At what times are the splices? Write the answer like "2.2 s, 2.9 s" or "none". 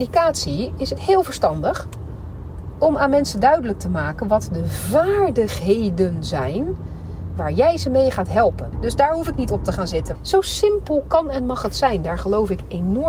8.7 s, 10.1 s